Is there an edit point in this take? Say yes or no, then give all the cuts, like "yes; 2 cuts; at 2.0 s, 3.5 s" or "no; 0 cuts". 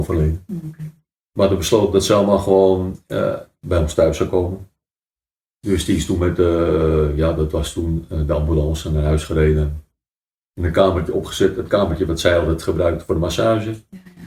no; 0 cuts